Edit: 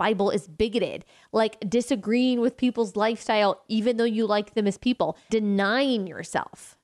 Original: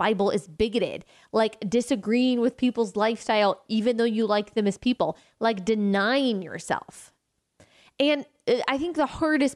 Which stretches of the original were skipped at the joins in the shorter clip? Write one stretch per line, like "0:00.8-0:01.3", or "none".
0:05.3-0:05.7